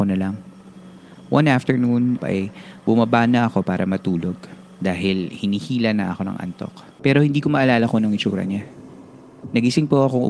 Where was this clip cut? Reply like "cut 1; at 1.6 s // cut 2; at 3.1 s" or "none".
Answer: cut 1; at 2.2 s // cut 2; at 7.0 s